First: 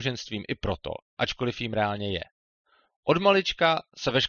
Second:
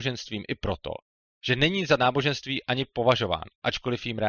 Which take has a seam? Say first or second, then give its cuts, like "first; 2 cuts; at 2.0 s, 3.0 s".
first; 1 cut; at 1.1 s